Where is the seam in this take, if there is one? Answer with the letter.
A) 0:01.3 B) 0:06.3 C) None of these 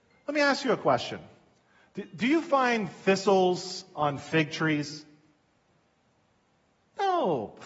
C